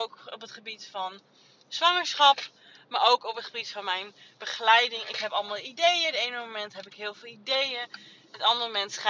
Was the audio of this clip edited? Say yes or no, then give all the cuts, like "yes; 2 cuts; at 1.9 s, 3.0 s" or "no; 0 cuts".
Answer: no; 0 cuts